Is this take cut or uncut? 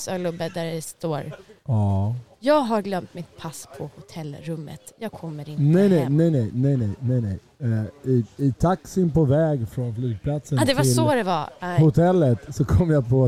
uncut